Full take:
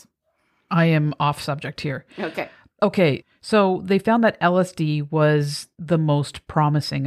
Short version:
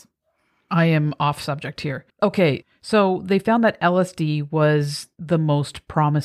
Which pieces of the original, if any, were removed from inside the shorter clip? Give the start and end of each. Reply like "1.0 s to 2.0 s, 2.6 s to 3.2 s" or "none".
2.1 s to 2.7 s